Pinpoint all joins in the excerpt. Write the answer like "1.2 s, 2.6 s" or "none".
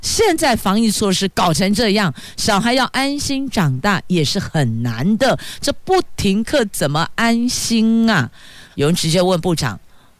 8.7 s